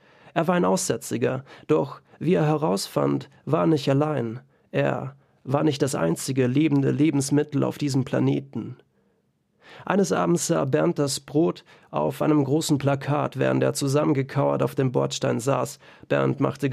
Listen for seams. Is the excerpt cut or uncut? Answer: uncut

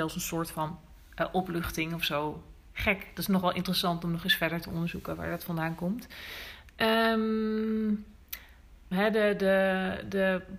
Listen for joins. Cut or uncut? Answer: cut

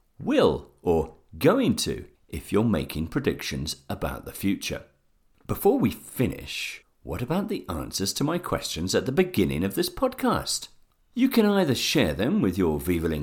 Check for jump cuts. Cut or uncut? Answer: cut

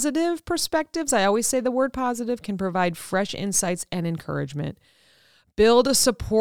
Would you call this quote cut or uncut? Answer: uncut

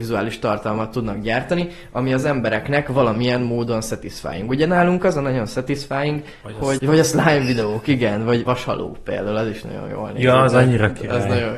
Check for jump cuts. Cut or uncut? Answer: cut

